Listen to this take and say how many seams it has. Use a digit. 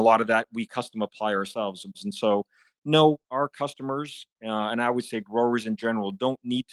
2